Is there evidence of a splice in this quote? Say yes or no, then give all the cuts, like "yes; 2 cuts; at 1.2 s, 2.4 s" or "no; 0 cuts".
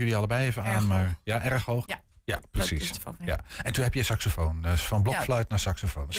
yes; 2 cuts; at 1.9 s, 3.2 s